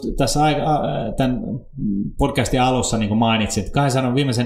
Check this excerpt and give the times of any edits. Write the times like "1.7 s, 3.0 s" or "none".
none